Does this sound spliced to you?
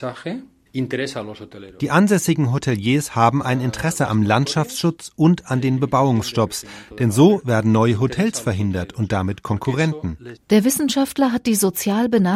yes; 1 cut; at 10.4 s

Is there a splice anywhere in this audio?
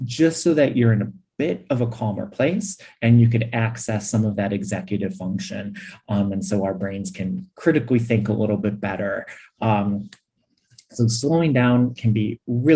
no; 0 cuts

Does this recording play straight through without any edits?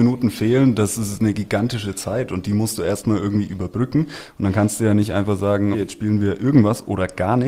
no; 1 cut; at 5.7 s

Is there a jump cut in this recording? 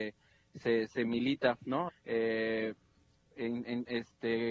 yes; 1 cut; at 1.9 s

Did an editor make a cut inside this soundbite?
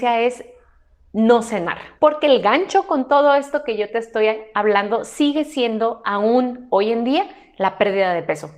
yes; 1 cut; at 2.0 s

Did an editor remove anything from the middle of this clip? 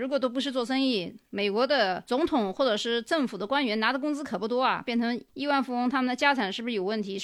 yes; 1 cut; at 4.8 s

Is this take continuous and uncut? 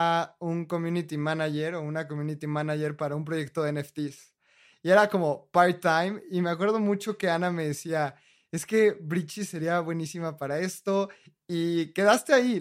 yes; 0 cuts

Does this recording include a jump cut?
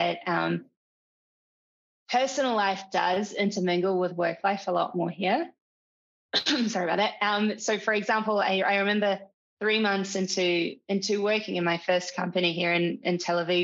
no; 0 cuts

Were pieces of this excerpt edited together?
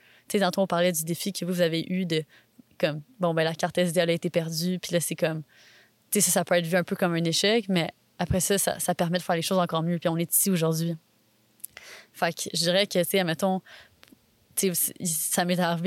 no; 0 cuts

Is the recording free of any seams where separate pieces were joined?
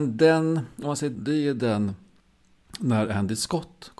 no; 1 cut; at 1.1 s

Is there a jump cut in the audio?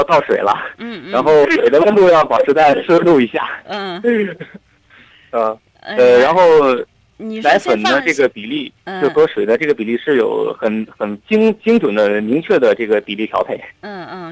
no; 0 cuts

